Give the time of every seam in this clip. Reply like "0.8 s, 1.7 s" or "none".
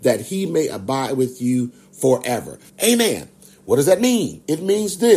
2.7 s